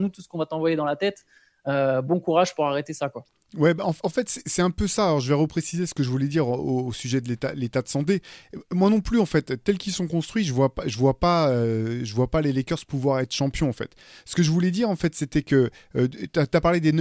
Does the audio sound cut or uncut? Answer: uncut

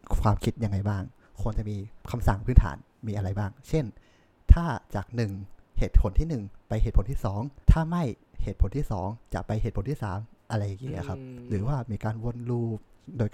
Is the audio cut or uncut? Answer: cut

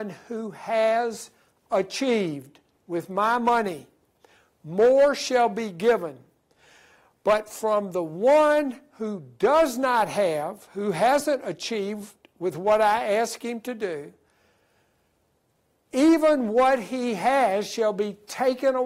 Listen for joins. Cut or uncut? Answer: uncut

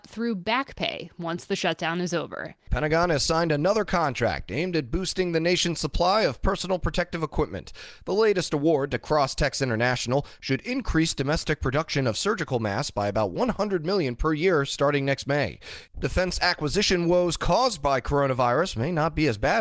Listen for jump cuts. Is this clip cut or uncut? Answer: cut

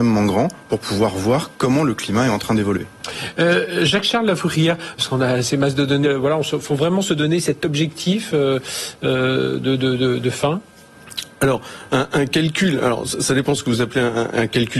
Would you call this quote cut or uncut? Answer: cut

